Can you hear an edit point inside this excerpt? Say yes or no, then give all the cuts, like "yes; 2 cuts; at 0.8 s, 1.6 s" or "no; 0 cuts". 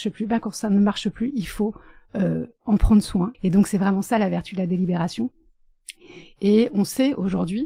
yes; 1 cut; at 3.3 s